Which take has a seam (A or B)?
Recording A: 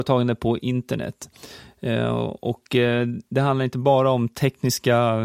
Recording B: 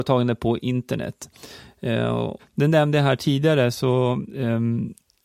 B